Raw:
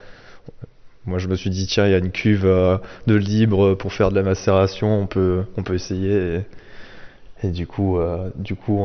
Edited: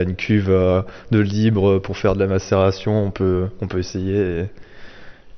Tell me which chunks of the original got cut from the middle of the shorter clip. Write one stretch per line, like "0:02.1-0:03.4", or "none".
none